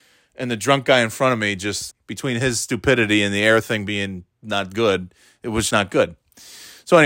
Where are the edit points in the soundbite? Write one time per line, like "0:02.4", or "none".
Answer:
0:01.9
0:05.7

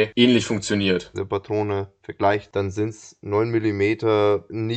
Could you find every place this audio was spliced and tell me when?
0:01.1

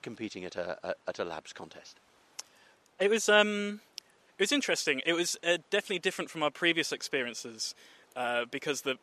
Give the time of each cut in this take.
none

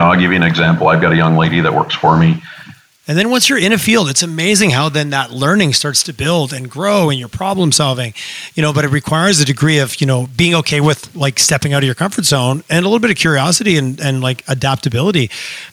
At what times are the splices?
0:03.0

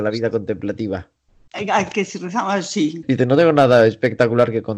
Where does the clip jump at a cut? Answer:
0:03.0

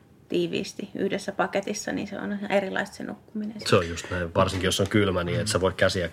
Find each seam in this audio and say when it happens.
none

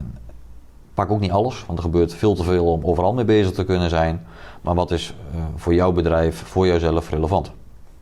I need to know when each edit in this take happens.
none

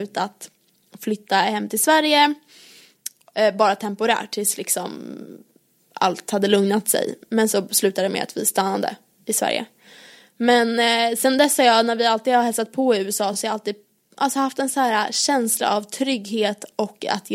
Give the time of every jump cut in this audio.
none

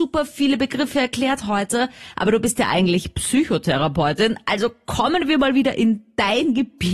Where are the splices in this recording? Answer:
none

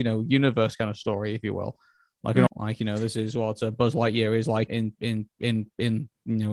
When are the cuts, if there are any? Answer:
0:02.5
0:04.7

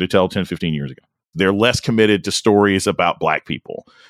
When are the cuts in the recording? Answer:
0:01.3

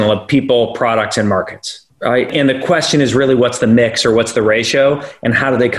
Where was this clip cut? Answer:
none

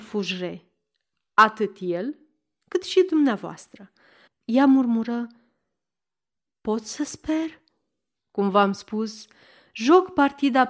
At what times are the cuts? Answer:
0:04.3
0:08.2

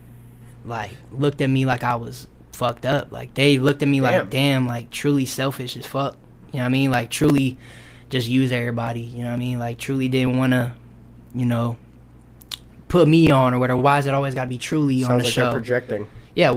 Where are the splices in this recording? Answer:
none

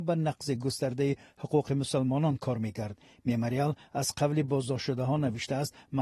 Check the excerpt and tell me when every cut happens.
none

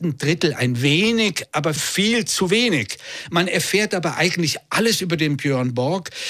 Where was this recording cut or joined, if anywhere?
0:01.8

